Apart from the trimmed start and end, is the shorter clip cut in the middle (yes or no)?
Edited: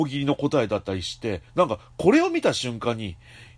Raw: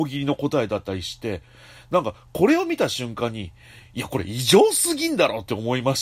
yes